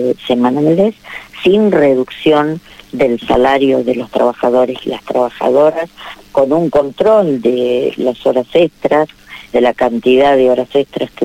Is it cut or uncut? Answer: cut